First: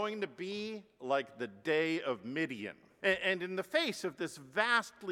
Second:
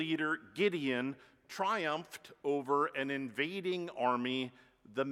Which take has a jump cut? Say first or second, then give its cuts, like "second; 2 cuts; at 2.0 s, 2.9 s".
first; 1 cut; at 3.0 s